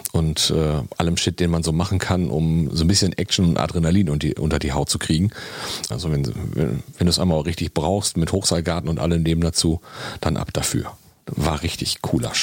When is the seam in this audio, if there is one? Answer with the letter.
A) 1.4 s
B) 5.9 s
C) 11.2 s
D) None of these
B